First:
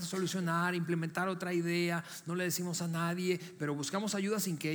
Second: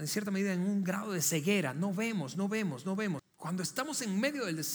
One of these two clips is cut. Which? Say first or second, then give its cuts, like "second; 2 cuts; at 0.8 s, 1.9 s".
second; 1 cut; at 3.2 s